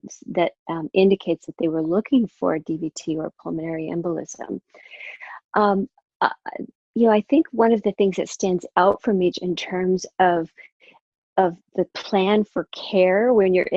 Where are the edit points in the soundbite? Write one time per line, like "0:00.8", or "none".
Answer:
0:06.8
0:09.3
0:11.9